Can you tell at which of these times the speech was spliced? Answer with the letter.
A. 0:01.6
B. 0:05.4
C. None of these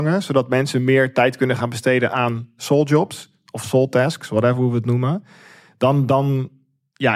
C